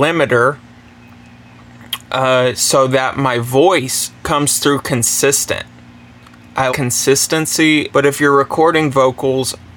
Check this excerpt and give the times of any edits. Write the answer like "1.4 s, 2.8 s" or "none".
6.7 s, 7.9 s